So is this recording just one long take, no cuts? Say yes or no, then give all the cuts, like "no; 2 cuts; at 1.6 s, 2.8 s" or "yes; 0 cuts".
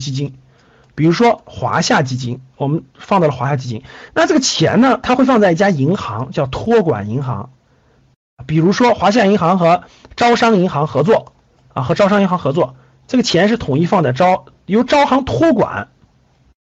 yes; 0 cuts